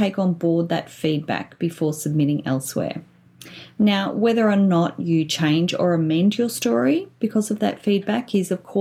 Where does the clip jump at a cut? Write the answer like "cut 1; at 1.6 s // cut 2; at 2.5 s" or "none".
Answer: none